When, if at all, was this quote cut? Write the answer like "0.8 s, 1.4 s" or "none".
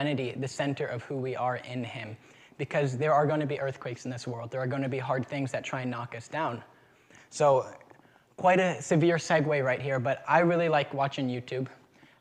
7.2 s